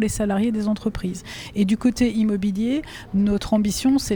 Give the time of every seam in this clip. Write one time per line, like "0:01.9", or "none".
none